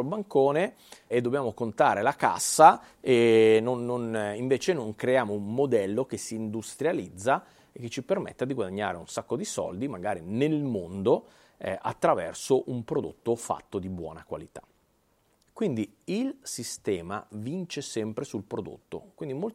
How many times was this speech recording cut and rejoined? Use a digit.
2